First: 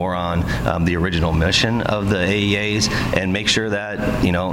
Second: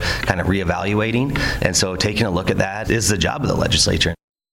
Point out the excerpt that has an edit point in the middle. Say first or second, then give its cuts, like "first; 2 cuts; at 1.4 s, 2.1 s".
second; 2 cuts; at 1.6 s, 2.8 s